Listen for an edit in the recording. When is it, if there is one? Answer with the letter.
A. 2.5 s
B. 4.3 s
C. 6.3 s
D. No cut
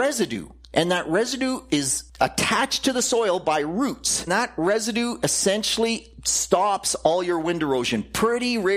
B